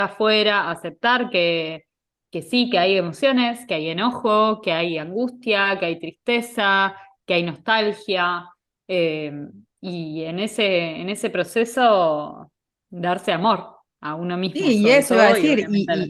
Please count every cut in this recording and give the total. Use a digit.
0